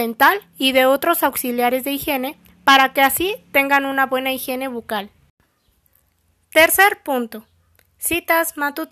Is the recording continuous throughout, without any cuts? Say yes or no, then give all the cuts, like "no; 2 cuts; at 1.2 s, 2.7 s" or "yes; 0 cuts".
yes; 0 cuts